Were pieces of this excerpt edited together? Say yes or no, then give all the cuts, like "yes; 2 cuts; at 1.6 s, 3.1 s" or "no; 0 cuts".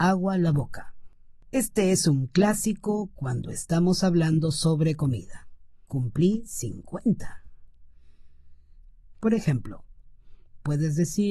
yes; 2 cuts; at 5.9 s, 9.1 s